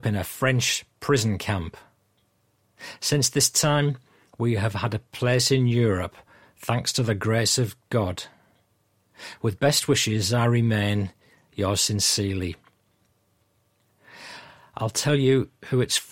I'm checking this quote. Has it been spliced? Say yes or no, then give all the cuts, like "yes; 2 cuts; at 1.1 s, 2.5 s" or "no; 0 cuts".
no; 0 cuts